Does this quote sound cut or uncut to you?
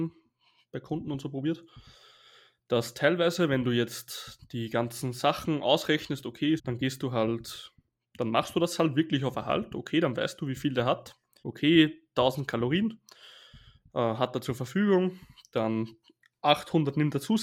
cut